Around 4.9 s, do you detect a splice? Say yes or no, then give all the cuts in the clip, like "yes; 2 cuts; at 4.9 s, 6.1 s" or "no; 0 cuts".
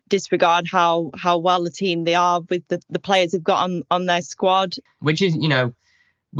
yes; 1 cut; at 4.9 s